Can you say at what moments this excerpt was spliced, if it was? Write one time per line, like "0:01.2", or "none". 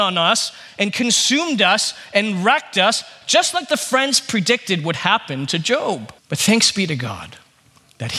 0:06.2